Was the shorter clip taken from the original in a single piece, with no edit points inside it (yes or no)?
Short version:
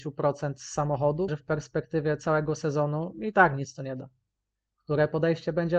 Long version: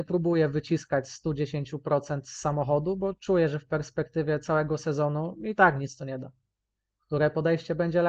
no